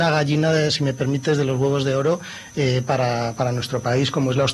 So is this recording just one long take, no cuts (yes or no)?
yes